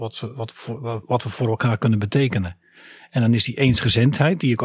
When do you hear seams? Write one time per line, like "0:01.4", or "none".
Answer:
none

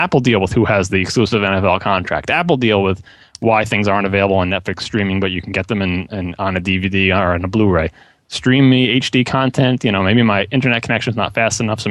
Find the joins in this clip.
none

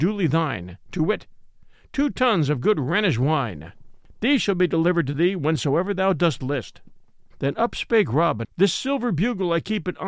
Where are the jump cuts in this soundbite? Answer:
0:07.3
0:08.4

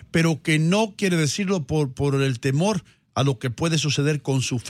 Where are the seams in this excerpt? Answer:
none

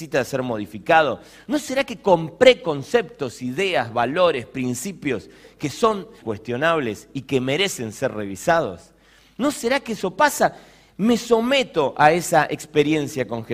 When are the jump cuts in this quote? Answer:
0:06.2

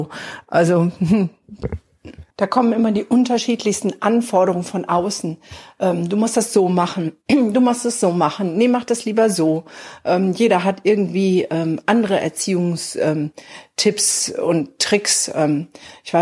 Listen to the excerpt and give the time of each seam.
0:02.3

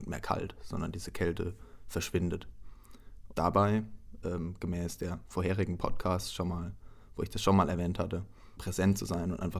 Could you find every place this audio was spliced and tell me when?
0:03.3
0:08.6

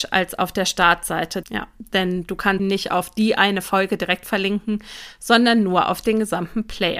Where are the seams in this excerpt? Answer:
0:01.4
0:02.6

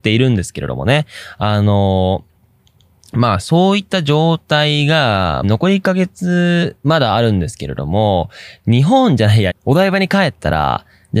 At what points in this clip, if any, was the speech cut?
0:05.4
0:09.5

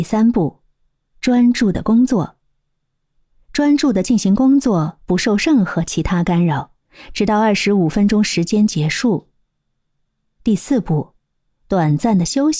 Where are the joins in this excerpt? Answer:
none

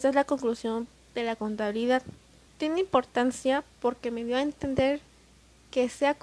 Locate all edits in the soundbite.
0:02.5

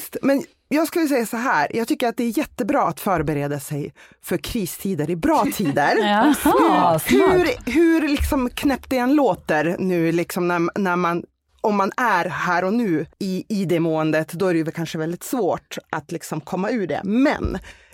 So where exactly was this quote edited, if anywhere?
0:13.1

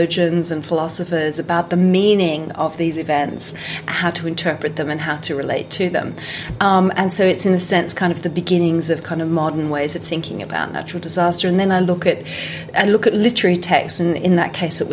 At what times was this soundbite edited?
none

